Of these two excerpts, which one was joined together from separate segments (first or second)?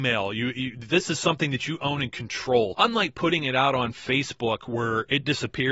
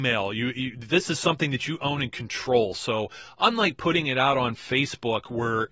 first